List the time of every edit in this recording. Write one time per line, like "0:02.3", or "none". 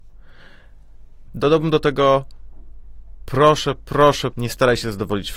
0:01.3
0:04.3